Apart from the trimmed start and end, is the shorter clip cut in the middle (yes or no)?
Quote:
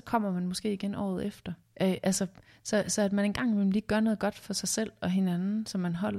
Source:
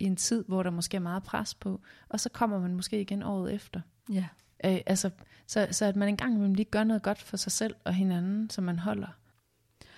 yes